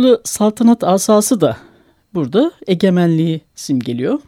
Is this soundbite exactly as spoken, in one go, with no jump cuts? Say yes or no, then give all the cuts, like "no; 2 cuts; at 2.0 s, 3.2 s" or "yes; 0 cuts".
yes; 0 cuts